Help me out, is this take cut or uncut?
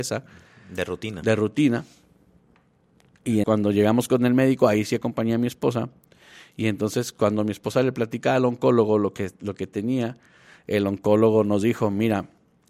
cut